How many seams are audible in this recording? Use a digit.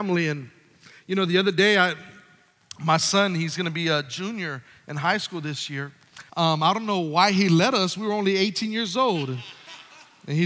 1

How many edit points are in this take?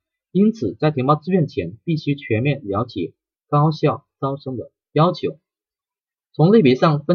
1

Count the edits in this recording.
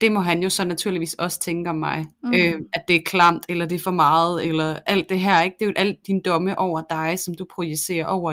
1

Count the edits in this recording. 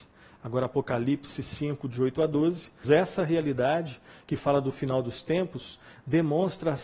1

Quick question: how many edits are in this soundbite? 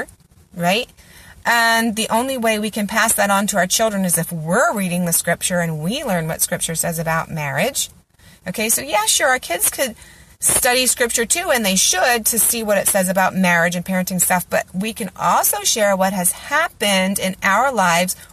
0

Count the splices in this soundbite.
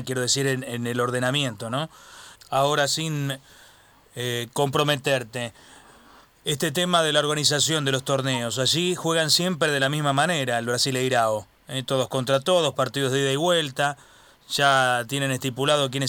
1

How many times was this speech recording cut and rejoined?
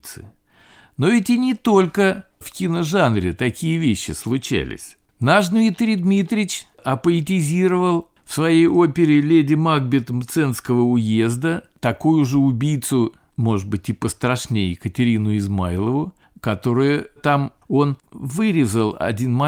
1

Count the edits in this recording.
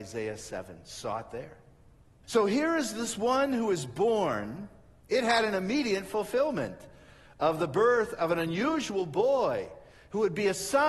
2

